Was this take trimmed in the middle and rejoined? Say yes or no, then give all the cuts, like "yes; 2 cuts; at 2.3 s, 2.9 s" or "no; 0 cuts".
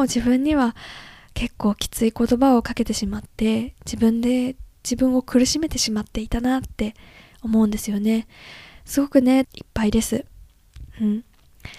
yes; 1 cut; at 9.4 s